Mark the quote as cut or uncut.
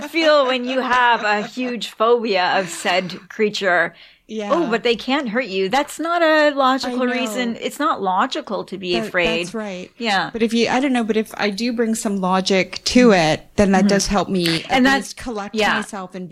uncut